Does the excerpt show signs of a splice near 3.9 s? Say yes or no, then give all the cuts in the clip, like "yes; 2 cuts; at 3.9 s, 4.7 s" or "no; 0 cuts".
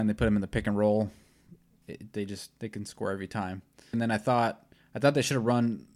yes; 1 cut; at 3.9 s